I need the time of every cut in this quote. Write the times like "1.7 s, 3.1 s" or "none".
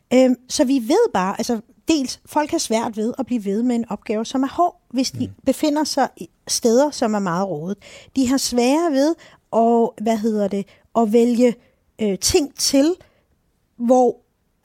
none

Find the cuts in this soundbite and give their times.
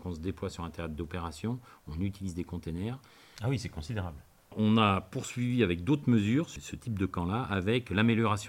3.3 s

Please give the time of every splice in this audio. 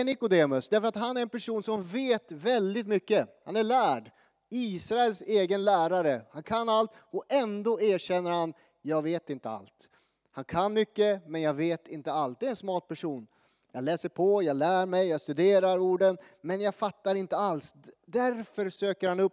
none

